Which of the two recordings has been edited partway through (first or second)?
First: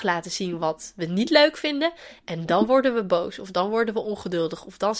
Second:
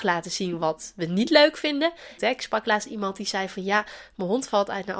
second